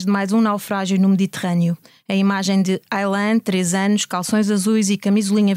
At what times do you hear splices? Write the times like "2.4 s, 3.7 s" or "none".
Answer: none